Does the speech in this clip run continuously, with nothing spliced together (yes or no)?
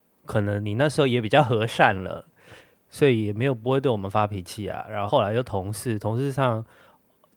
no